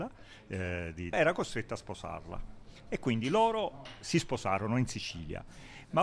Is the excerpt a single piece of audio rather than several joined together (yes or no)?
no